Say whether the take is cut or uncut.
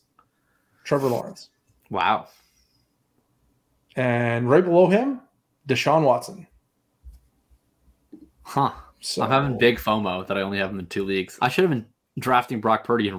cut